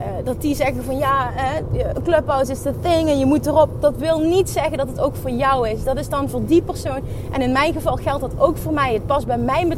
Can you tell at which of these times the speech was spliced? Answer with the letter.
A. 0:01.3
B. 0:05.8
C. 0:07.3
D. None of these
D